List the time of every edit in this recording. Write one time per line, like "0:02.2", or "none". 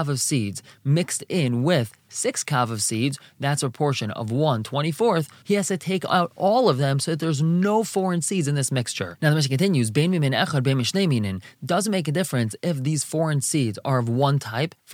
0:05.4